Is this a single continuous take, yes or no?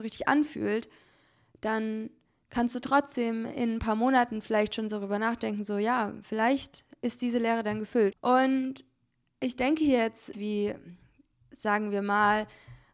no